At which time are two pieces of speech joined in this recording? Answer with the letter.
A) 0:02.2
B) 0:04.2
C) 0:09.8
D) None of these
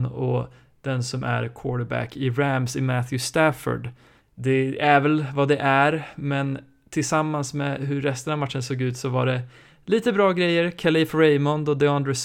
B